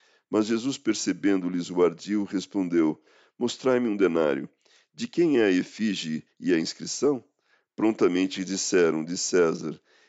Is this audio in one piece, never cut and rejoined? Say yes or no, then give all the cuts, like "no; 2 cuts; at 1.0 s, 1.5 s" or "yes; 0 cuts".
yes; 0 cuts